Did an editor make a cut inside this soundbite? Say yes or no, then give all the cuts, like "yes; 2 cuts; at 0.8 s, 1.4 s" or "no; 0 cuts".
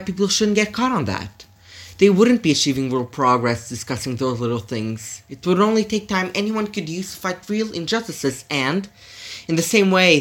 no; 0 cuts